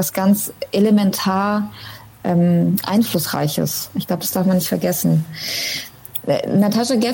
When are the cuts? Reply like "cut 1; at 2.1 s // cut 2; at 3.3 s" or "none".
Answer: none